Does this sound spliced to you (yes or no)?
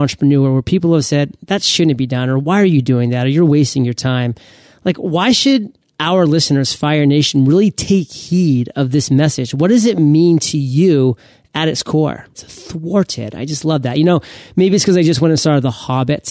yes